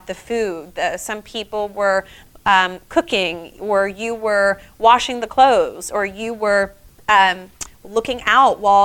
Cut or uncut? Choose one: uncut